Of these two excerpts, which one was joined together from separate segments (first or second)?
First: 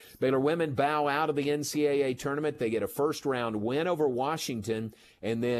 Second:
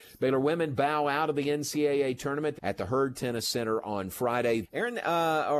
second